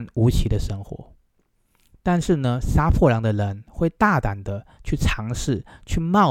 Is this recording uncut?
yes; 0 cuts

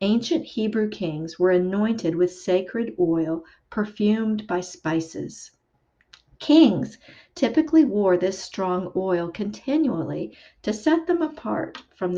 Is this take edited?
no; 0 cuts

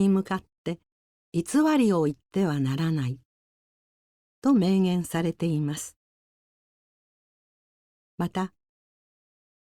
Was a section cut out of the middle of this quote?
no; 0 cuts

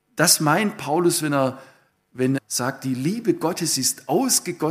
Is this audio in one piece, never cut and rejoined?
no; 1 cut; at 2.4 s

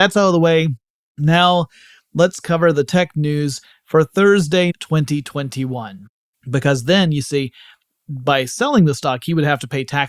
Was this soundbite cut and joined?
yes; 2 cuts; at 4.7 s, 6.3 s

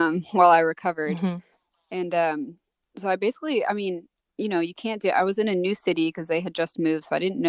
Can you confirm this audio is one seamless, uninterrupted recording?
yes; 0 cuts

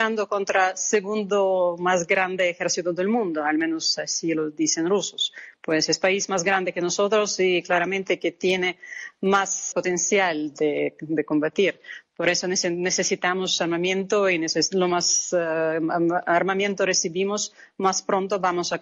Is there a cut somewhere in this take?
yes; 1 cut; at 9.7 s

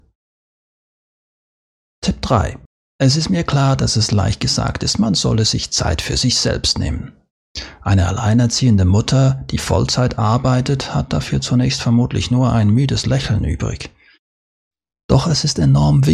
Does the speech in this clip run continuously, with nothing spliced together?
no; 1 cut; at 2.9 s

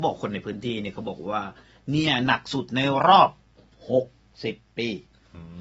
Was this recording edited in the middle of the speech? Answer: no; 0 cuts

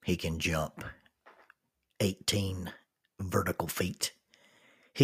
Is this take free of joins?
yes; 0 cuts

